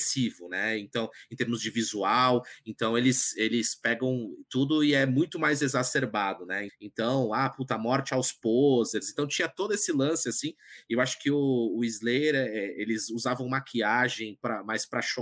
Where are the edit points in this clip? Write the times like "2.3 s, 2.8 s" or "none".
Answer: 6.7 s